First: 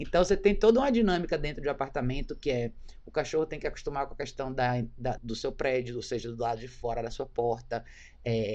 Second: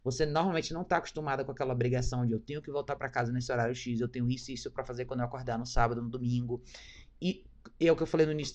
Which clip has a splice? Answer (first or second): first